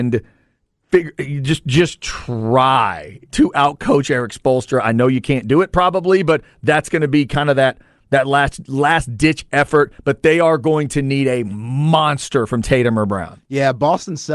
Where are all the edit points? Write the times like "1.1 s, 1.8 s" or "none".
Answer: 3.3 s